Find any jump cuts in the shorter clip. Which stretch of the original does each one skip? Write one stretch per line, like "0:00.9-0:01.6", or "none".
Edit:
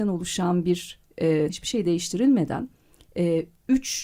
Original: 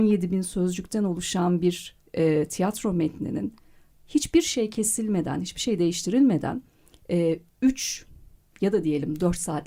0:02.5-0:05.4